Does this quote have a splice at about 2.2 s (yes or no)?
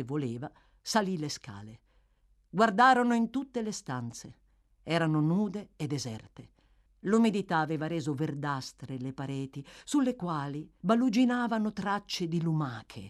no